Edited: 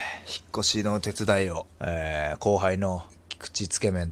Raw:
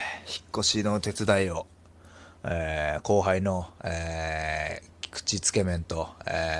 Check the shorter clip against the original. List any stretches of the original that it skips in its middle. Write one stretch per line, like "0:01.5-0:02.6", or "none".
0:01.7-0:02.4
0:03.7-0:04.8